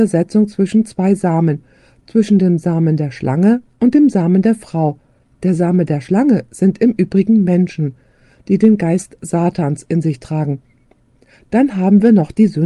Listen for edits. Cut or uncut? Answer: uncut